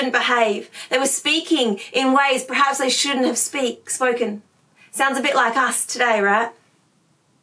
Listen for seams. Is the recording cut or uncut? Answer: uncut